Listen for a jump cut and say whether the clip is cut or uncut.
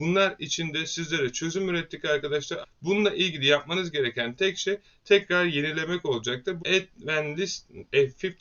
cut